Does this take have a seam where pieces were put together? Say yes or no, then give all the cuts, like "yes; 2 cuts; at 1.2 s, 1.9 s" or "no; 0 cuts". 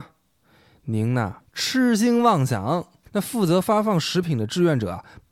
yes; 2 cuts; at 1.5 s, 3.0 s